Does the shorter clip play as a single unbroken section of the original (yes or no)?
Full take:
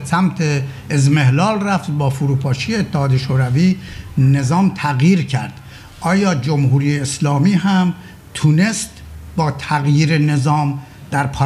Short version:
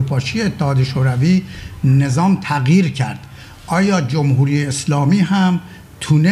yes